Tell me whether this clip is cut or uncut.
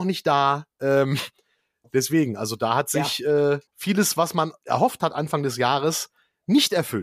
cut